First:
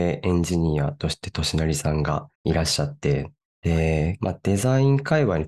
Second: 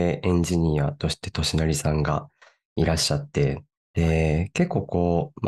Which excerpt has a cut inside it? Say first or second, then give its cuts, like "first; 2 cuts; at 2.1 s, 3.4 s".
first; 2 cuts; at 2.3 s, 4.2 s